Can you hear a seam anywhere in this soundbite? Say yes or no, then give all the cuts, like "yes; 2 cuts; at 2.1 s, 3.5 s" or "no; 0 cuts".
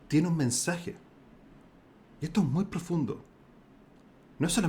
no; 0 cuts